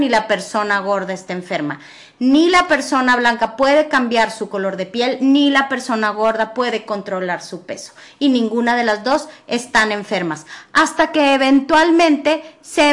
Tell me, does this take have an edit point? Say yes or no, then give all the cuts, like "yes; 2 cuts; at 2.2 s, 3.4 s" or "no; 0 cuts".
no; 0 cuts